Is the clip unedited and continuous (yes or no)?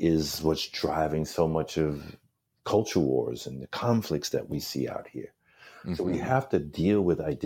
yes